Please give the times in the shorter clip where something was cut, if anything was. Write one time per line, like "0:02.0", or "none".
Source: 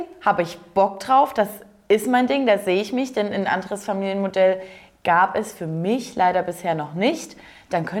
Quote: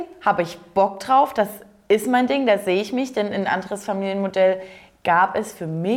none

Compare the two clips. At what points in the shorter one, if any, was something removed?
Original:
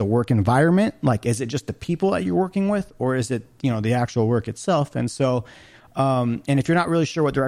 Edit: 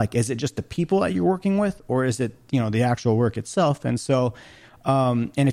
none

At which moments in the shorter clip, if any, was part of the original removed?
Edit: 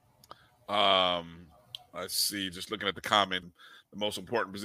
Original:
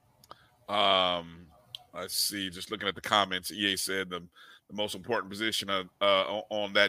0:03.4

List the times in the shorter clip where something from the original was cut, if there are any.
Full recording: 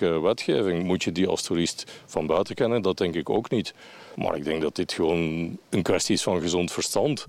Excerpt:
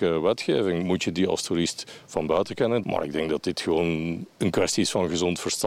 0:02.8

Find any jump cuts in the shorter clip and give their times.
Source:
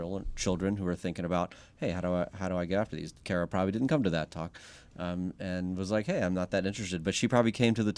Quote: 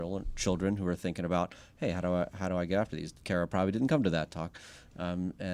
none

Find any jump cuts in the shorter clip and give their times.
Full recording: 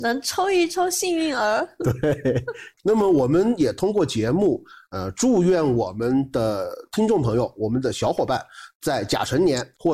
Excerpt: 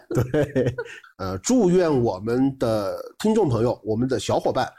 0:01.0

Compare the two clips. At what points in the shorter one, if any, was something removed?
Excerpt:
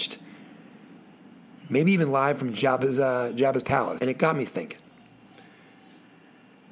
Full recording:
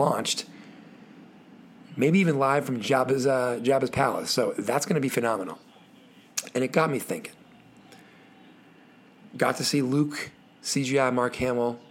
0:04.0

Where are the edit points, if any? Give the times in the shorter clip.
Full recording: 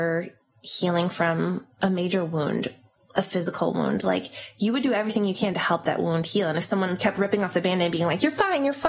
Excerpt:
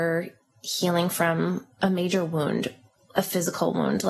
none

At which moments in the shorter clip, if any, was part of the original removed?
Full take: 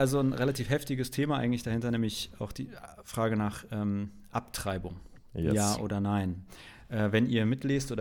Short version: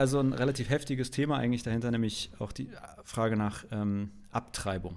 none

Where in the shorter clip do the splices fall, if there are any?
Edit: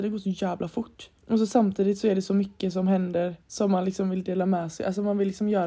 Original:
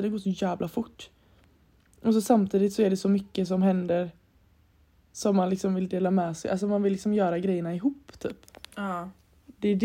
0:01.2
0:03.4

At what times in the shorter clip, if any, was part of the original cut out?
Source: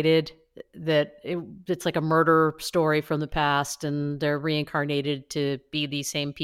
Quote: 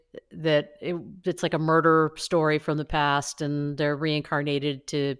none

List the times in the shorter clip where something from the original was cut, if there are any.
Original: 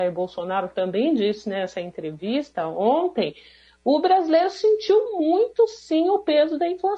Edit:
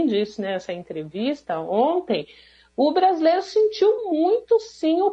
none

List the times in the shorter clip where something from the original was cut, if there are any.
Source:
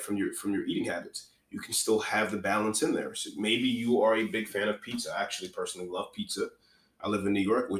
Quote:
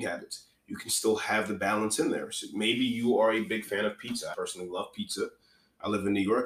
0:04.3

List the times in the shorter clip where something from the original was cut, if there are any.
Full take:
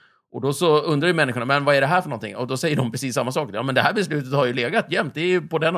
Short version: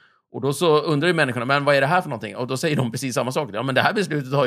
none

